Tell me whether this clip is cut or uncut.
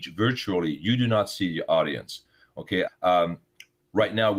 cut